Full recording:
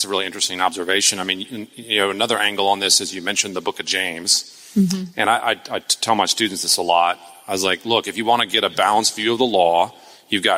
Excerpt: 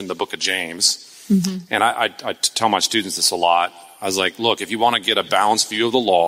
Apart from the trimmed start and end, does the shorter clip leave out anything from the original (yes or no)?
no